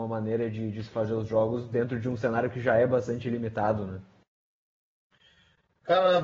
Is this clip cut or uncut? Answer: uncut